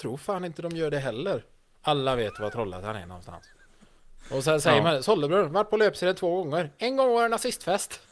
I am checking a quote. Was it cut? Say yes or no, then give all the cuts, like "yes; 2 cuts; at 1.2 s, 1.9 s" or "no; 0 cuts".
yes; 1 cut; at 1.7 s